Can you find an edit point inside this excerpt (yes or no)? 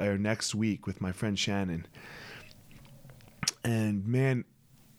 no